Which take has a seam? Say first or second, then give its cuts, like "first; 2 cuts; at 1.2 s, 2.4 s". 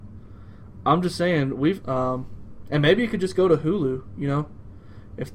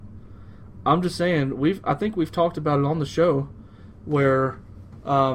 first; 1 cut; at 1.8 s